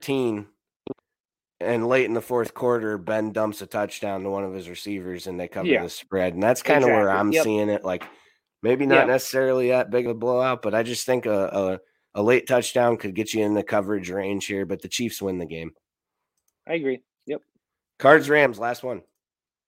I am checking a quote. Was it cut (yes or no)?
no